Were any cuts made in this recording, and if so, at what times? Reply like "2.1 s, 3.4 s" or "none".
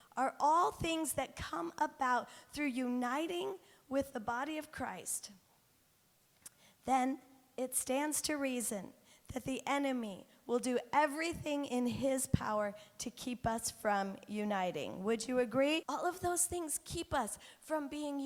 15.8 s